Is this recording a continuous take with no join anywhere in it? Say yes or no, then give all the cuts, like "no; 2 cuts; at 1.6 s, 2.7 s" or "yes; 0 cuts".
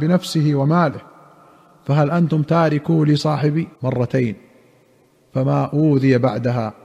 no; 1 cut; at 3.7 s